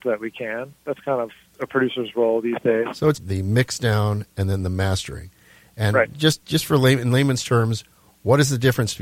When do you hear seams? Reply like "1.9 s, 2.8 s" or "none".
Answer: 1.5 s, 3.1 s

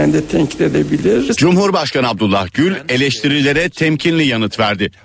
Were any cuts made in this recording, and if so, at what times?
1.3 s

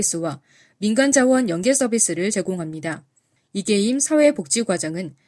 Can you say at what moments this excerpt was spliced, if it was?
3.4 s

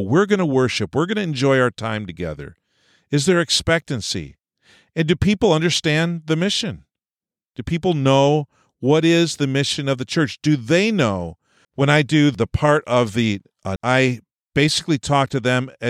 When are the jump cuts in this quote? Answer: 11.6 s, 13.8 s

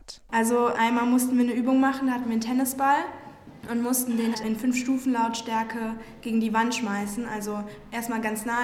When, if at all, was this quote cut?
4.3 s

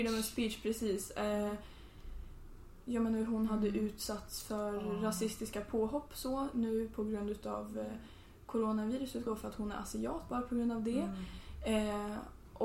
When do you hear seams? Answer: 2.8 s, 9.3 s

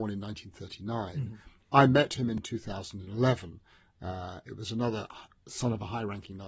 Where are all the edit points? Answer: none

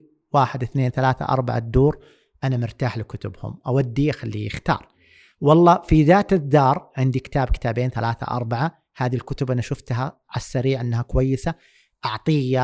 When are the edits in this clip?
none

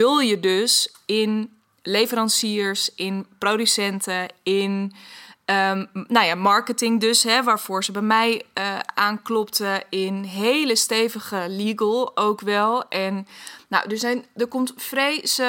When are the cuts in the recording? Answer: none

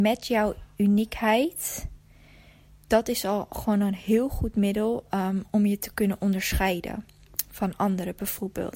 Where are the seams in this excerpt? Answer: none

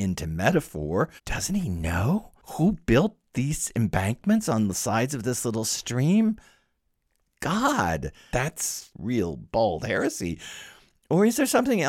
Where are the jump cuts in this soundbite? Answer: 1.2 s, 8.3 s

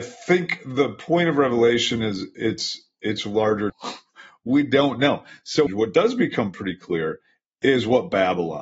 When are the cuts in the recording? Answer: 3.7 s, 5.7 s

